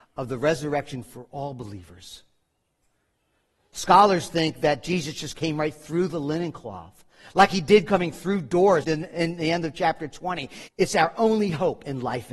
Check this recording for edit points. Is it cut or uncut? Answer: cut